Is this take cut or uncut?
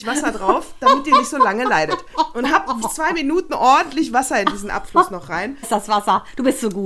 cut